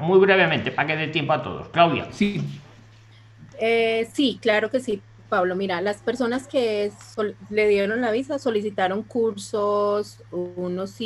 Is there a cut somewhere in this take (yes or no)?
no